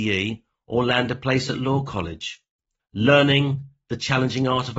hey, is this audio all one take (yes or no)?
yes